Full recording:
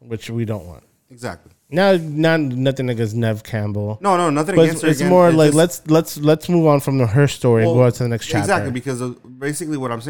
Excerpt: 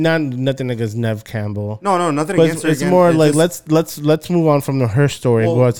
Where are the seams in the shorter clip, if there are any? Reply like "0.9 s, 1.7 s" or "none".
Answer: none